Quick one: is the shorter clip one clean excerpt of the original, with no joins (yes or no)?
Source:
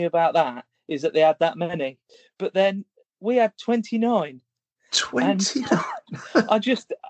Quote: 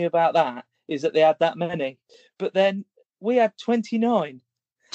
yes